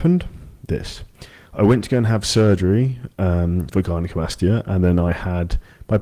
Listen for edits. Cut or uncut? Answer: uncut